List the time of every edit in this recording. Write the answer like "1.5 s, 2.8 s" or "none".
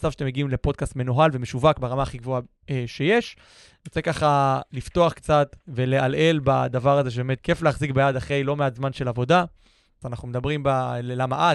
5.6 s, 7.4 s, 10.0 s